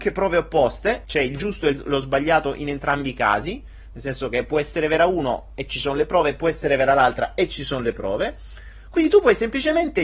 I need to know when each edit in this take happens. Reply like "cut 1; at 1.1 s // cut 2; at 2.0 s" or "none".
cut 1; at 1.0 s